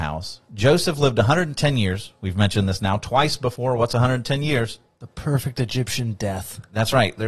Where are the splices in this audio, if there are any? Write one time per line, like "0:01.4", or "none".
none